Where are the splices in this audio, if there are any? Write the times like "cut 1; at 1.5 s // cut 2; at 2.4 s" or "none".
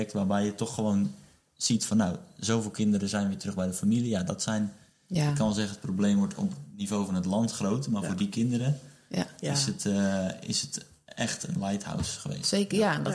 none